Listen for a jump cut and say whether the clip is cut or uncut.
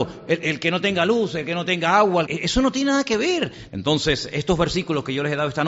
cut